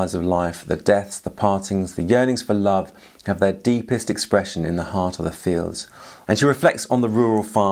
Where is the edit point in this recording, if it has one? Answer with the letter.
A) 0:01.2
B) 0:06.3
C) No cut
B